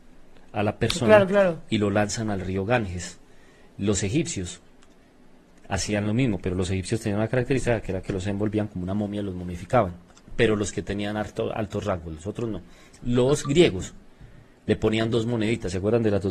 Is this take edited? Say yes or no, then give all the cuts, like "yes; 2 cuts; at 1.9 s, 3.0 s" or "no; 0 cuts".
no; 0 cuts